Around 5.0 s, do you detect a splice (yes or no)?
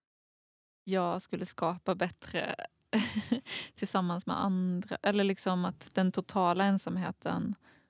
no